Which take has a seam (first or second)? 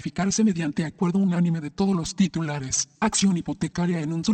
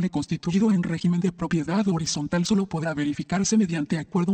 first